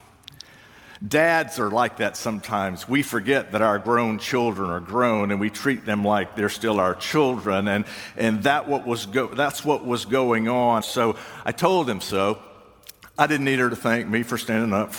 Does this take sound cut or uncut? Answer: cut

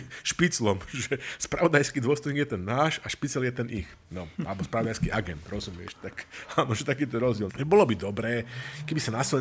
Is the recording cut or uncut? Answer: cut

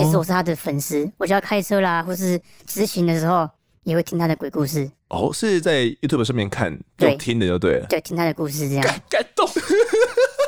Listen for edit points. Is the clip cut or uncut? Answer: uncut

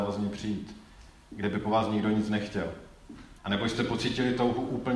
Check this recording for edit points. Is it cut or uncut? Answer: cut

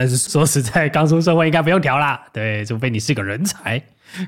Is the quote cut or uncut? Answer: uncut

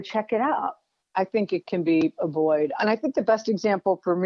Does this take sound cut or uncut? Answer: cut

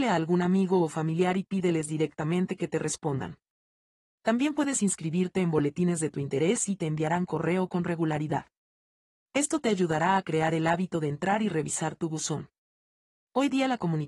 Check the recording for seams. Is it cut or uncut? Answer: uncut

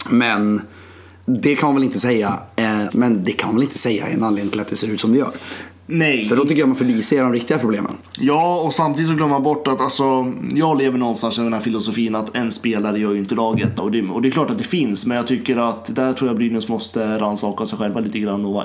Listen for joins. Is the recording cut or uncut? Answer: cut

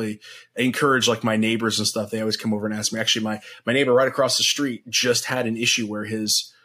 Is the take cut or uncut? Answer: uncut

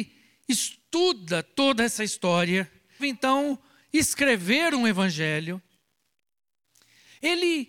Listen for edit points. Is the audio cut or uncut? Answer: cut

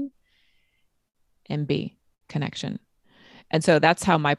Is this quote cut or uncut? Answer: cut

